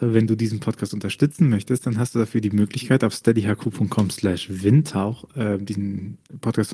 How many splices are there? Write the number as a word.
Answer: zero